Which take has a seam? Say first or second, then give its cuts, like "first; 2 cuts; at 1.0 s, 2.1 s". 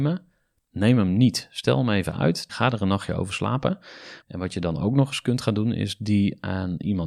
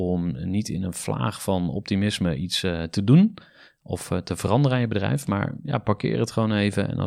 first; 2 cuts; at 2.5 s, 4.2 s